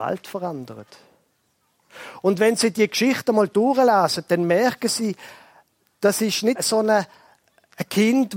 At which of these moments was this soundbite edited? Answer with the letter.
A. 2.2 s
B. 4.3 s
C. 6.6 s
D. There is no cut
C